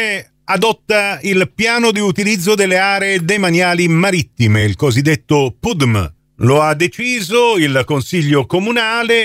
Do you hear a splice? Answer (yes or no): no